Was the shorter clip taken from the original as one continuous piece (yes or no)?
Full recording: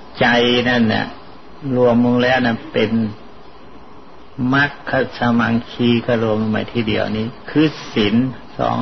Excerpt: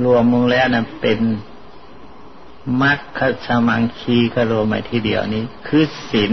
no